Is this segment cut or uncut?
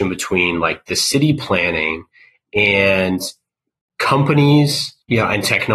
uncut